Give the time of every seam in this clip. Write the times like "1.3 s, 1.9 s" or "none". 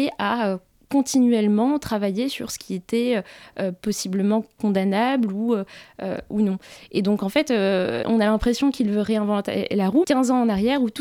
8.0 s, 10.0 s